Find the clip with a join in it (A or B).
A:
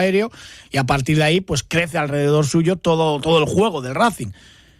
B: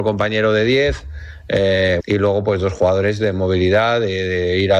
B